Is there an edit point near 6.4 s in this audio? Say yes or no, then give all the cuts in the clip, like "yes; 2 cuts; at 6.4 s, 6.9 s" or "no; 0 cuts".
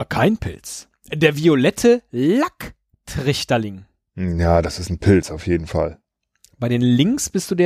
no; 0 cuts